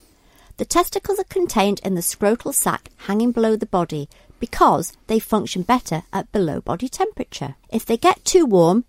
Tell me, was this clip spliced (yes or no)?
yes